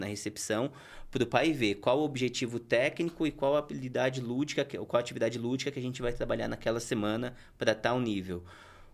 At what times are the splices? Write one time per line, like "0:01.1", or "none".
none